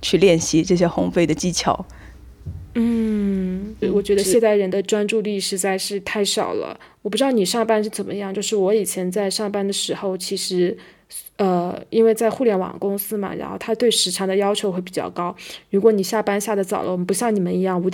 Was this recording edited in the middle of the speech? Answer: no; 0 cuts

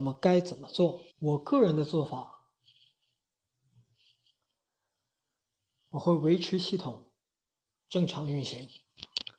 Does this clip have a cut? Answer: yes; 1 cut; at 1.1 s

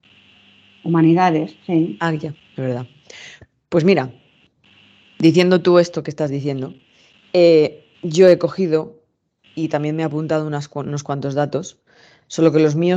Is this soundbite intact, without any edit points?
no; 2 cuts; at 2.3 s, 7.9 s

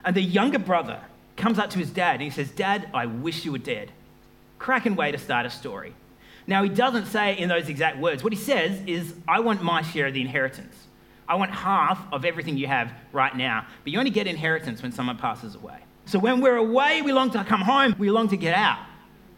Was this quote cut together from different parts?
yes; 2 cuts; at 16.1 s, 17.9 s

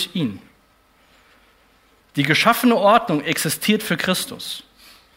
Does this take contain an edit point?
no; 0 cuts

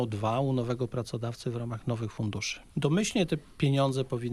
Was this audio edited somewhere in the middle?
yes; 1 cut; at 2.7 s

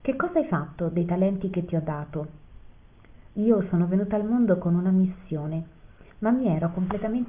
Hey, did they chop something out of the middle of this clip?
yes; 2 cuts; at 3.3 s, 6.1 s

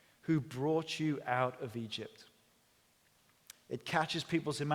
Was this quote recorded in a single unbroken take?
no; 1 cut; at 3.5 s

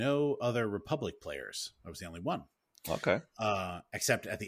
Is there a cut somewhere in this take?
no; 0 cuts

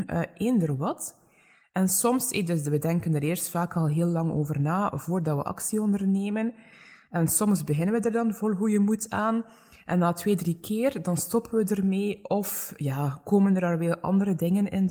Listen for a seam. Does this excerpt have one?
no; 0 cuts

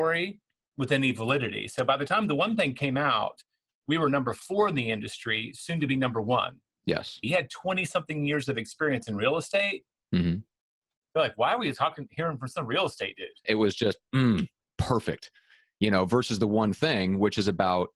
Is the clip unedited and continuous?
no; 3 cuts; at 7.2 s, 11.1 s, 13.4 s

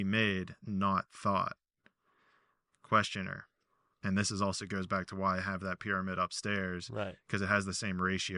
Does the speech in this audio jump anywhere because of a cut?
yes; 1 cut; at 3.9 s

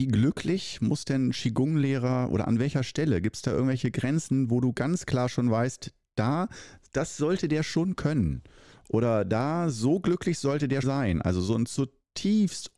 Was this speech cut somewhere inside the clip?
yes; 1 cut; at 10.8 s

